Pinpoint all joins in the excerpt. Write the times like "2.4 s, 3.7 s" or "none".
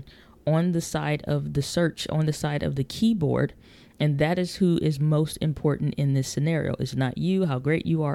none